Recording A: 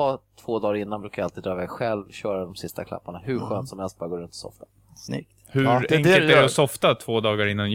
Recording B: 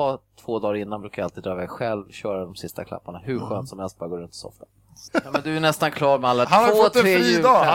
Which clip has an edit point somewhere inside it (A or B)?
B